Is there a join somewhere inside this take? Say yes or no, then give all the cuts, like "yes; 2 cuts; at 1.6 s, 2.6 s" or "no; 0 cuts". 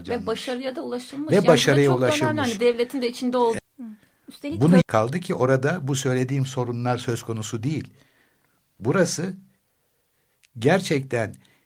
yes; 2 cuts; at 3.6 s, 4.8 s